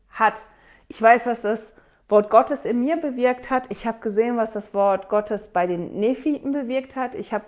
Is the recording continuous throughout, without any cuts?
yes; 0 cuts

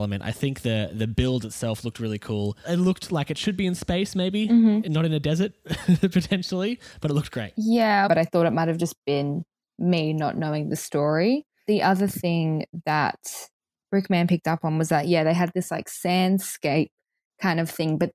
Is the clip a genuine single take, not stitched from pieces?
no; 1 cut; at 8.1 s

